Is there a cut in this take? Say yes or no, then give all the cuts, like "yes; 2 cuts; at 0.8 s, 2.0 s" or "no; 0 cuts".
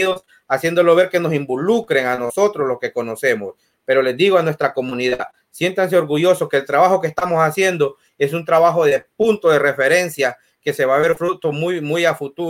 no; 0 cuts